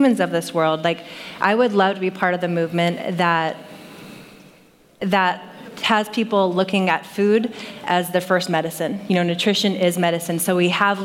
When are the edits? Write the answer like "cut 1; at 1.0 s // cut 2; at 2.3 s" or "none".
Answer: none